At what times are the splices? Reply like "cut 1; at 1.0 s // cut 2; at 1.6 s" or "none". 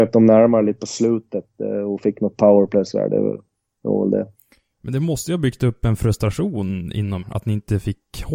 cut 1; at 7.2 s